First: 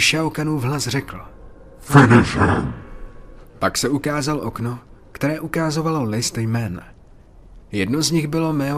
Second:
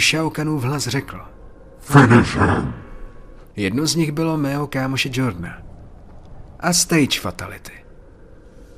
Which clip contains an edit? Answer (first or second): second